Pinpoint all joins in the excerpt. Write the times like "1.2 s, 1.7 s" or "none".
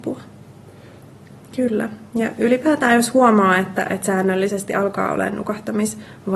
1.4 s